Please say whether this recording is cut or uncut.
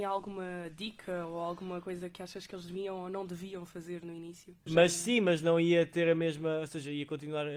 cut